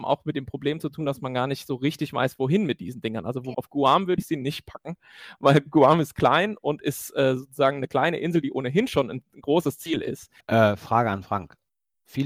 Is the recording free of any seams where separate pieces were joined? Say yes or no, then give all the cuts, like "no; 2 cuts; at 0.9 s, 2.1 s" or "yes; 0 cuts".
no; 2 cuts; at 3.5 s, 10.4 s